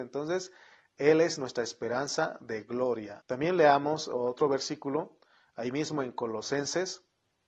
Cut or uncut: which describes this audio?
cut